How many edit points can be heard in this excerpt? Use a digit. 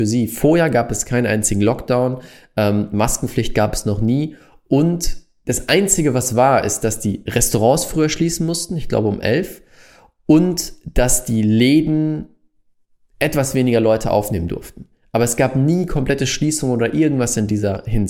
0